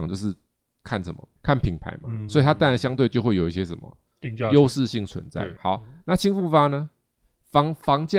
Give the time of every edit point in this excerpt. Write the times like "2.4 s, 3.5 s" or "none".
1.4 s, 5.6 s